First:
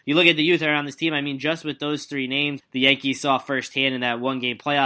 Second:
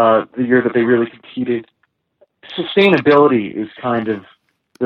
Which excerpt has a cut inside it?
first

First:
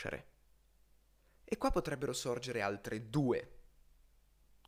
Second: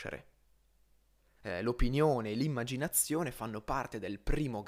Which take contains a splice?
second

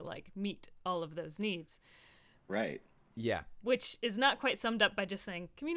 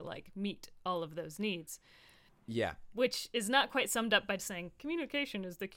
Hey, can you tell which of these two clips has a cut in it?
second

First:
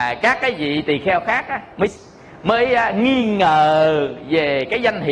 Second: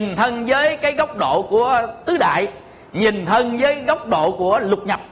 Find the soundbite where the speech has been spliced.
first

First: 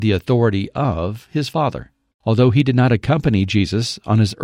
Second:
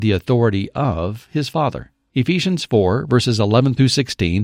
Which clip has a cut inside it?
first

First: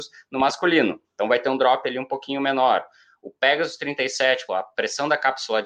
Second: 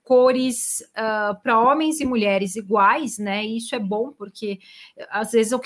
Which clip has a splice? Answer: first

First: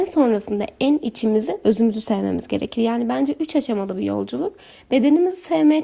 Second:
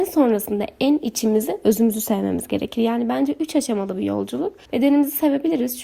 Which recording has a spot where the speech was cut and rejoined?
second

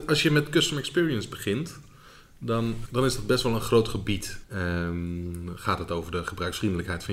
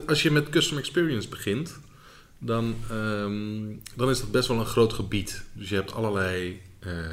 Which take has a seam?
first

